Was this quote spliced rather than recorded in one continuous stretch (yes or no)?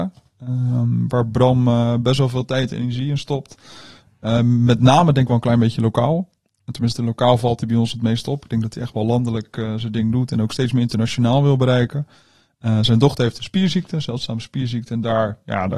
no